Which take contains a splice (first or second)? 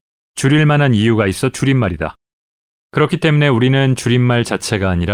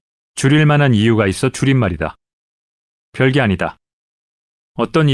first